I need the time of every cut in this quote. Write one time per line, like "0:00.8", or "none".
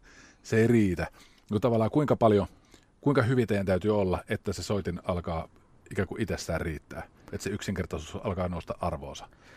none